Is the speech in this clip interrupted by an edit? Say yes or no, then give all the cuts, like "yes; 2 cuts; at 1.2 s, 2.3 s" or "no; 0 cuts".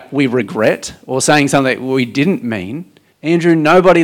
yes; 1 cut; at 3.1 s